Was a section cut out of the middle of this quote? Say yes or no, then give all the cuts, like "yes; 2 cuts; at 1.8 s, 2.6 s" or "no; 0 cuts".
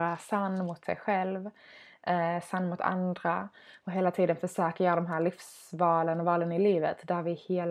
no; 0 cuts